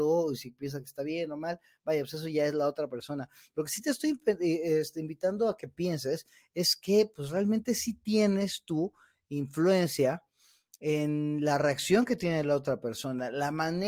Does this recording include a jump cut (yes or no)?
no